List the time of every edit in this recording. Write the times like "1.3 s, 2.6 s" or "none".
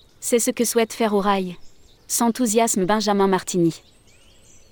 2.0 s

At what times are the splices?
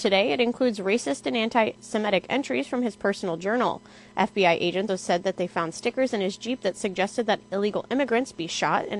4.9 s

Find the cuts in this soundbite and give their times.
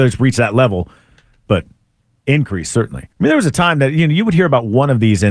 1.5 s, 3.1 s

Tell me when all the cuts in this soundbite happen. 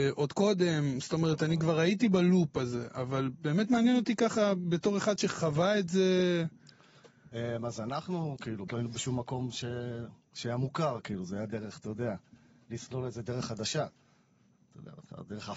8.7 s

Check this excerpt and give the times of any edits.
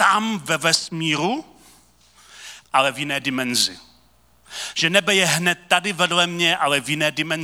2.6 s

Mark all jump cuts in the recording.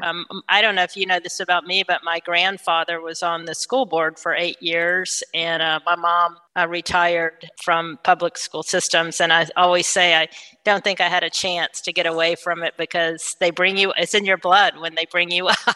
none

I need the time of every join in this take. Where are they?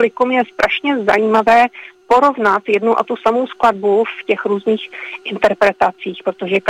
none

